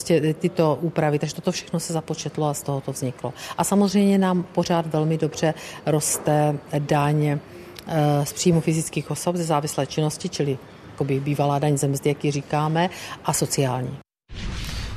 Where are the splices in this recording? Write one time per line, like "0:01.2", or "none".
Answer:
none